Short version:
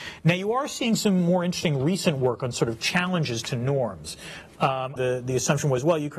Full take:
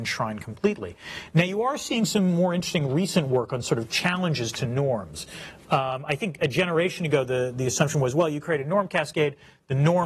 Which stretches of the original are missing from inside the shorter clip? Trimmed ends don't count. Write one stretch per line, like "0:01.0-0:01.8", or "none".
0:06.1-0:07.3

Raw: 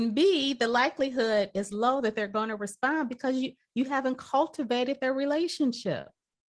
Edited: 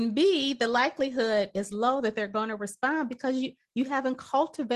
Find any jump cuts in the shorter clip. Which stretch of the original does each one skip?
none

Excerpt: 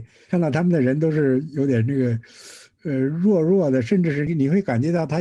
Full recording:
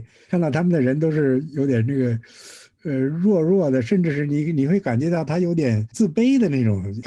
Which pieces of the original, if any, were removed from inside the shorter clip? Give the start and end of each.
0:04.3-0:04.4

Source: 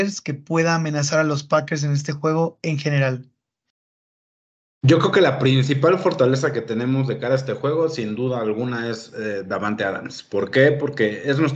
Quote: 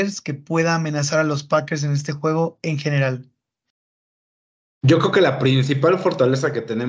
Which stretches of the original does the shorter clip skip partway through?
none

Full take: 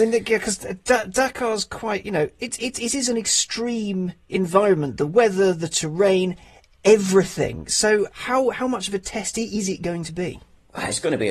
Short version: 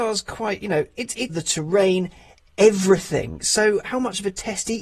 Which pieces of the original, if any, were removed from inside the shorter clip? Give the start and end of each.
0:02.7-0:05.6
0:08.1-0:08.5

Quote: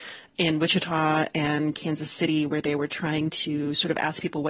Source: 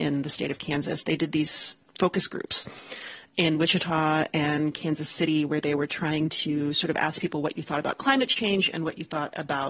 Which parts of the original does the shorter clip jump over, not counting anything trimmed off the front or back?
none

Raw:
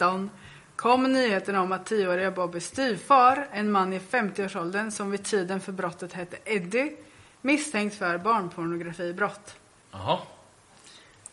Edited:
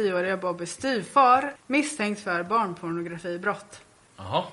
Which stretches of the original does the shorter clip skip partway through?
0:03.5-0:07.3

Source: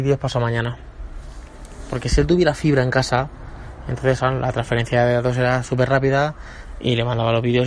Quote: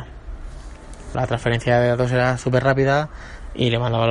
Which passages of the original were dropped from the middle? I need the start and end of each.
0:01.9-0:04.4

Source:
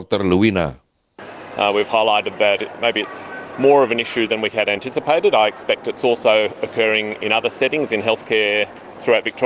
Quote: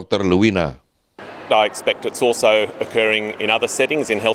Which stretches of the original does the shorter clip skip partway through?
0:01.5-0:05.3

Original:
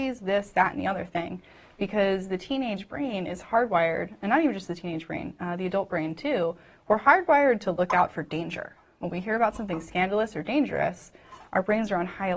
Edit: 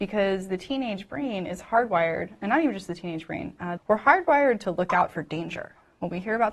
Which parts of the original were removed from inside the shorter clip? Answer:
0:05.6-0:06.8

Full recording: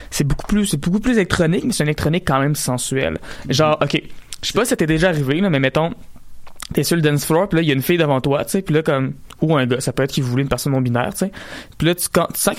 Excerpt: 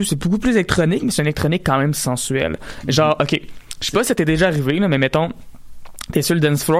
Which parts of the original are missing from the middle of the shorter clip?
none

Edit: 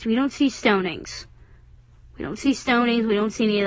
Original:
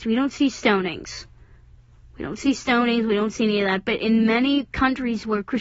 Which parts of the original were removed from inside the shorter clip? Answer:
none

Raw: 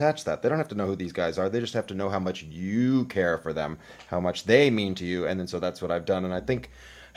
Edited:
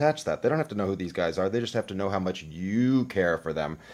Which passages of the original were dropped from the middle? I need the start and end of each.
none

